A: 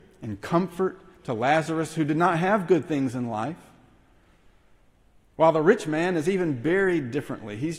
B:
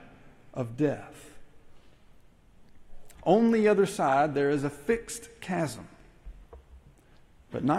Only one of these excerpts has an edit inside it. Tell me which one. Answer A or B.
B